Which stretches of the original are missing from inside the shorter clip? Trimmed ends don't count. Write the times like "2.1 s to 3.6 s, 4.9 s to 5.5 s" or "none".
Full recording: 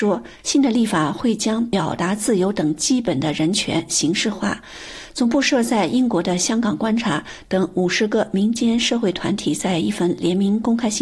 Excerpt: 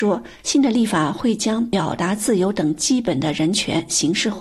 none